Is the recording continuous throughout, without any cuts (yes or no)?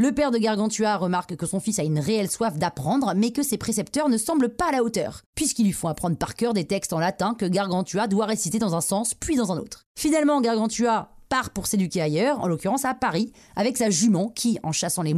yes